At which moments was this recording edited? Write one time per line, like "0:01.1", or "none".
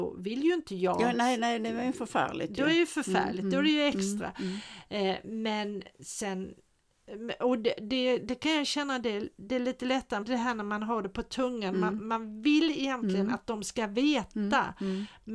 0:10.2